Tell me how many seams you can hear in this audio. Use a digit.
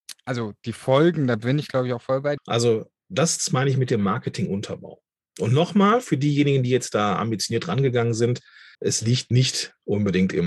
2